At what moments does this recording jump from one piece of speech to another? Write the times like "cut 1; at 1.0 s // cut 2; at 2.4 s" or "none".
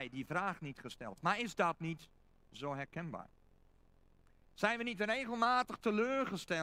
cut 1; at 4.4 s